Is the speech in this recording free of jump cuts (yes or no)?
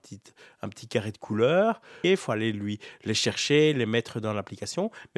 no